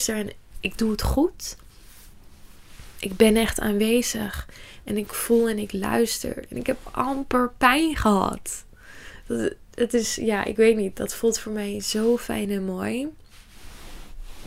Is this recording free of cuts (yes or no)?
yes